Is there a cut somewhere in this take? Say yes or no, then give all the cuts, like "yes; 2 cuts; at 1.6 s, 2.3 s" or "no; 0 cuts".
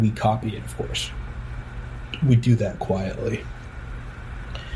no; 0 cuts